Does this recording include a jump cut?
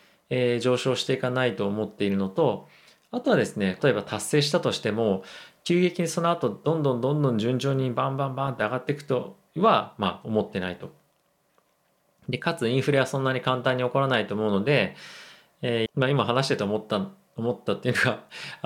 yes; 2 cuts; at 3.8 s, 15.9 s

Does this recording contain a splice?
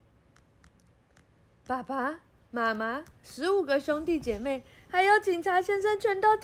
no; 0 cuts

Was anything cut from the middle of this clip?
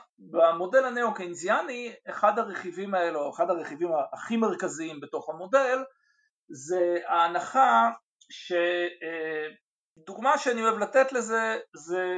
yes; 1 cut; at 9.9 s

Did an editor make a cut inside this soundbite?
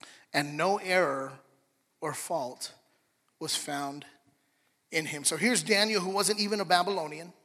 no; 0 cuts

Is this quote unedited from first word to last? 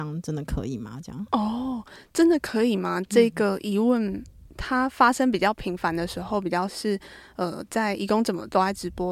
yes; 0 cuts

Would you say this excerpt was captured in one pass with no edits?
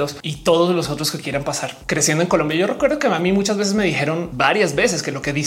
yes; 0 cuts

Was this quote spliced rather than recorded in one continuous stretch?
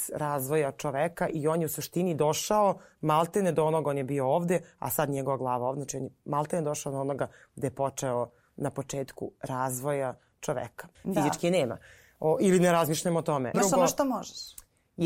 yes; 2 cuts; at 10.9 s, 13.5 s

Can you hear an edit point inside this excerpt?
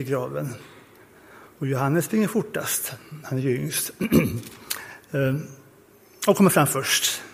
no; 0 cuts

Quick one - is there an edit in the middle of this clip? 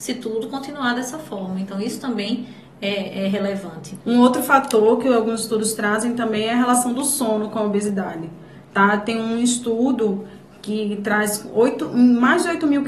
no; 0 cuts

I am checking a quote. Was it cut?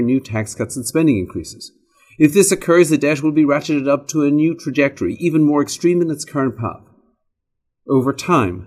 no; 0 cuts

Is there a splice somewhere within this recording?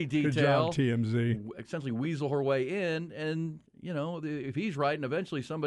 no; 0 cuts

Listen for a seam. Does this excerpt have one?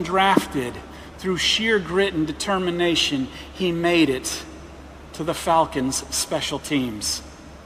no; 0 cuts

